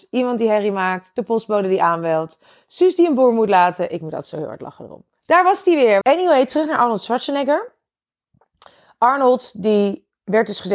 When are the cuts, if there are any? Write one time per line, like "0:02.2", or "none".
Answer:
0:06.0